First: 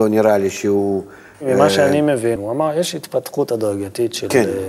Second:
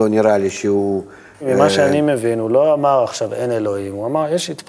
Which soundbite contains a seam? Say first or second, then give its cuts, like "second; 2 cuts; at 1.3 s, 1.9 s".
first; 1 cut; at 2.4 s